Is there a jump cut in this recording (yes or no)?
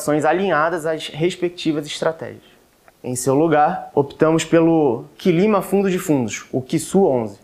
yes